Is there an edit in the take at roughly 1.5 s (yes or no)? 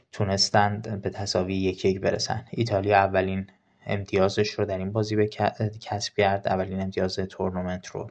no